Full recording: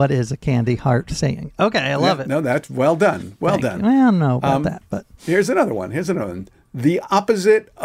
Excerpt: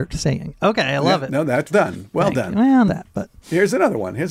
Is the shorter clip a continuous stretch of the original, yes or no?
no